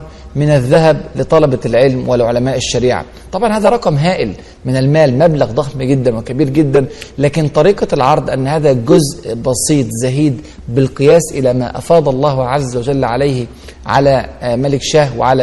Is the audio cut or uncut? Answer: uncut